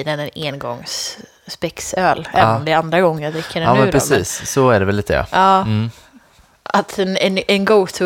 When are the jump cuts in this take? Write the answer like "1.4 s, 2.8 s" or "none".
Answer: none